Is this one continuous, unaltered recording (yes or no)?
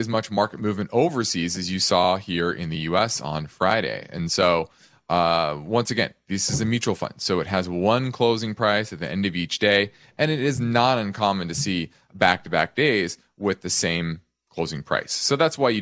yes